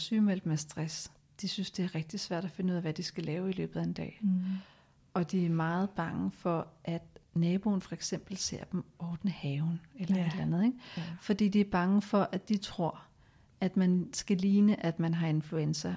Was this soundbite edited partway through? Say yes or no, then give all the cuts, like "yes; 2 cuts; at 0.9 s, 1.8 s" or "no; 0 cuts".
no; 0 cuts